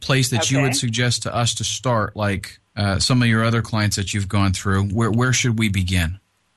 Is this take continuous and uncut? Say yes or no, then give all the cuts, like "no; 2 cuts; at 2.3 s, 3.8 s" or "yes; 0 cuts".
no; 1 cut; at 2.7 s